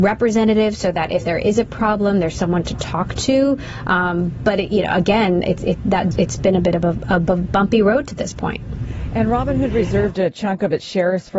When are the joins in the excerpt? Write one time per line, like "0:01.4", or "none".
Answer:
0:06.1